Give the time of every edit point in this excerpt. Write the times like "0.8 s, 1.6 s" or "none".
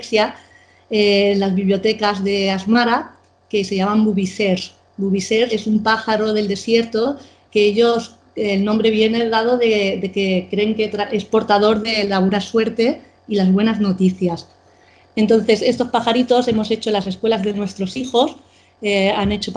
5.5 s